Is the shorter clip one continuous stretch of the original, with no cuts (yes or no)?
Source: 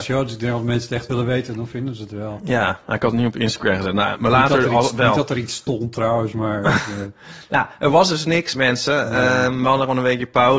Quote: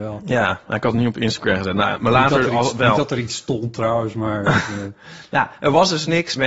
yes